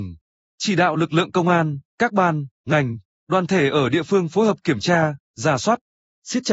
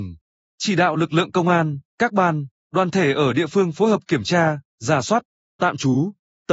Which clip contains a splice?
second; 2 cuts; at 2.5 s, 5.4 s

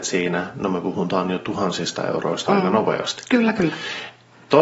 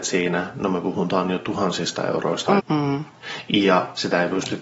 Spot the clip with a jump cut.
second; 1 cut; at 2.6 s

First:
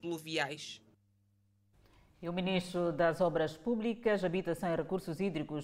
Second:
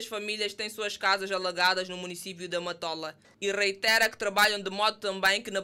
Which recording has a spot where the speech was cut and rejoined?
second; 1 cut; at 3.2 s

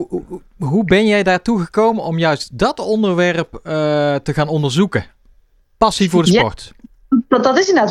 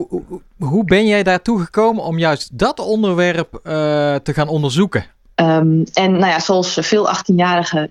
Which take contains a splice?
second; 1 cut; at 5.3 s

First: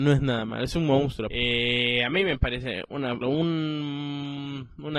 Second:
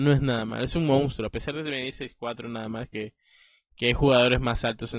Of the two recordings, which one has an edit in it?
first; 2 cuts; at 1.3 s, 3.2 s

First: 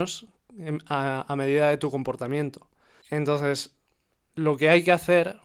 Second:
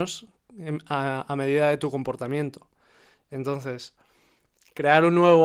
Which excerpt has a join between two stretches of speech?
first; 1 cut; at 3.0 s

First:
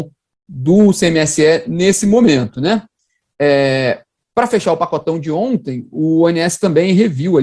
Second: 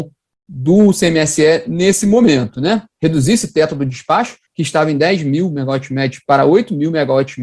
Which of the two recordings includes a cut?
second; 2 cuts; at 2.9 s, 4.5 s

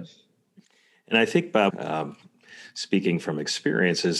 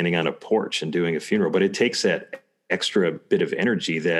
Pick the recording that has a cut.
first; 1 cut; at 1.7 s

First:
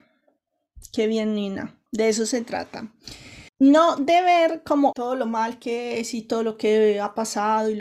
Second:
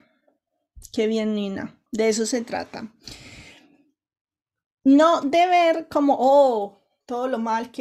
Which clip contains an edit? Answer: first; 2 cuts; at 3.5 s, 4.9 s

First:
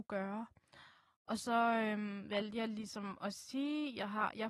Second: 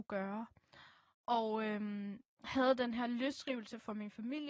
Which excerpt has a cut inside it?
second; 2 cuts; at 1.1 s, 2.3 s

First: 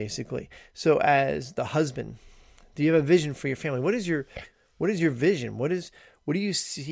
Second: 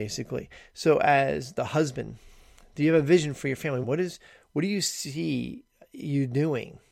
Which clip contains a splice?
second; 1 cut; at 3.8 s

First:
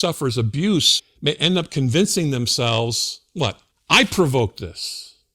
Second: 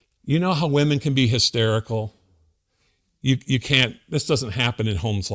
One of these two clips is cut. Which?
first; 2 cuts; at 1.0 s, 3.7 s

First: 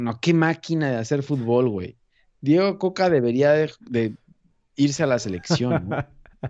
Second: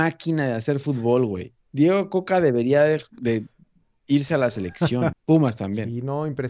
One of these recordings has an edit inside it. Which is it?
second; 2 cuts; at 1.6 s, 5.1 s

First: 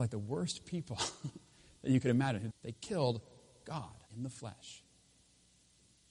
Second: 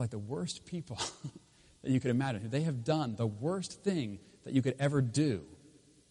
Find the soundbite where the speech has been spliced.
first; 2 cuts; at 2.5 s, 4.1 s

